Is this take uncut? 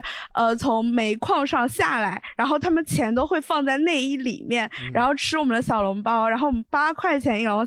yes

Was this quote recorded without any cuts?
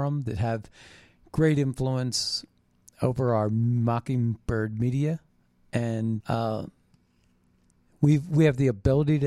no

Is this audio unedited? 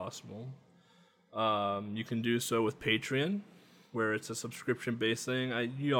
yes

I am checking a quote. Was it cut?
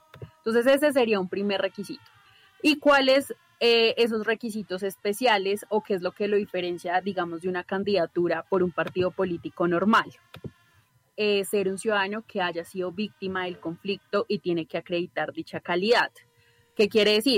no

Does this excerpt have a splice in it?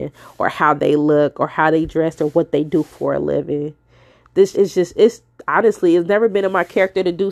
yes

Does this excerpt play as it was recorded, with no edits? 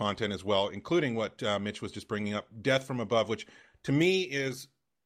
yes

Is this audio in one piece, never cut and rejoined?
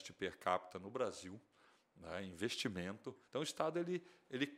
no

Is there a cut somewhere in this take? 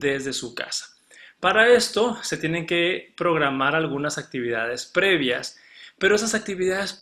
no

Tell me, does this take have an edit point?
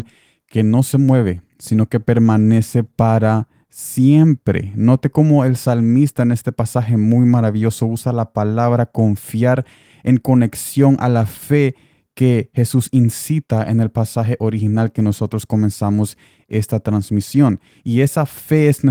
no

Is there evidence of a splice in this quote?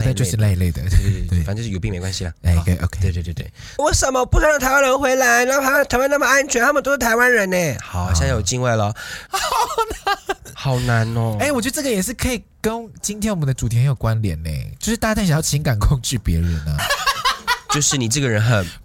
yes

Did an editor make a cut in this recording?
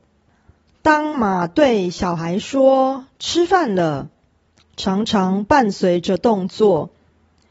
yes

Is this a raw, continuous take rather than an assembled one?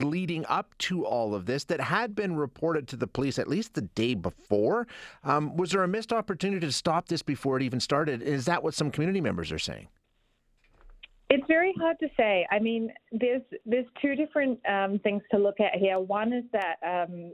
yes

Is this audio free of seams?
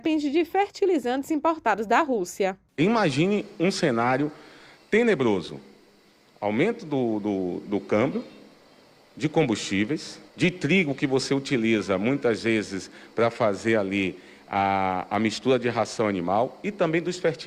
no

